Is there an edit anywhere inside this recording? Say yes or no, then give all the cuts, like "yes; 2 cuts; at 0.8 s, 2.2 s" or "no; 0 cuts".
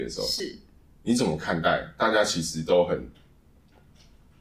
no; 0 cuts